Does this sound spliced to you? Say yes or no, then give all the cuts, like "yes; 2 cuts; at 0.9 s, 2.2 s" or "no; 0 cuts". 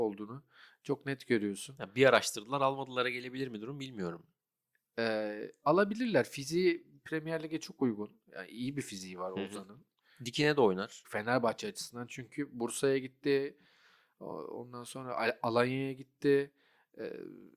yes; 1 cut; at 11.0 s